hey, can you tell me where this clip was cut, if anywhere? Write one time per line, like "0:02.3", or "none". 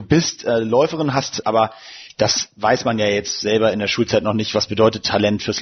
0:01.4